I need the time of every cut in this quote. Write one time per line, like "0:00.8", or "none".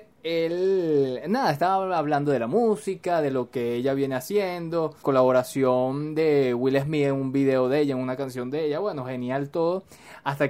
0:05.0